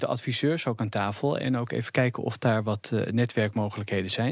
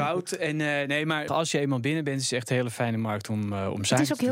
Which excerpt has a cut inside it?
second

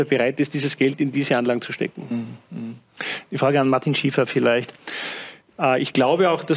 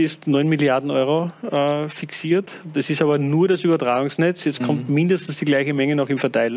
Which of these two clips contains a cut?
first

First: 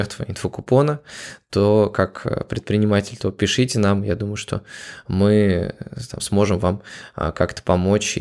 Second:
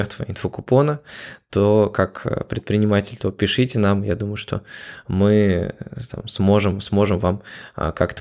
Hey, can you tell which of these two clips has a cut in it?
first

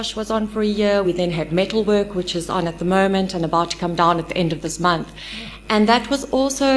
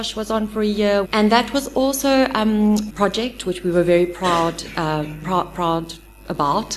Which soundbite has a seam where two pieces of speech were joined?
second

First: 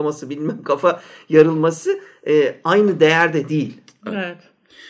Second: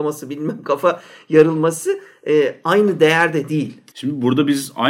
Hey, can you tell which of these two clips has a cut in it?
second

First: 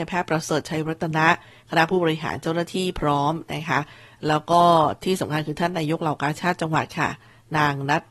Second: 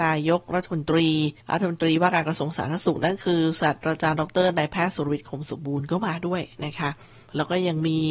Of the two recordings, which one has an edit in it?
second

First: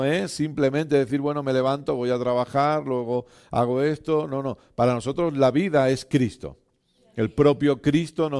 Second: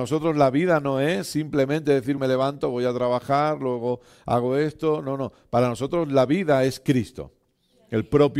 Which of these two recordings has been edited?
second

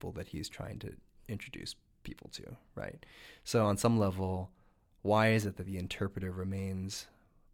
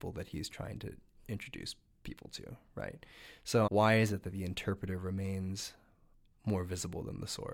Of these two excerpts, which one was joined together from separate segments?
second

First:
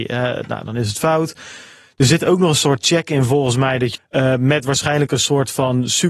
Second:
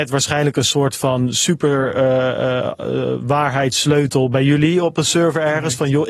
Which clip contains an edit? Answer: first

